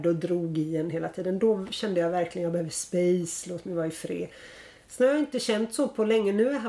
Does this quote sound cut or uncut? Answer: uncut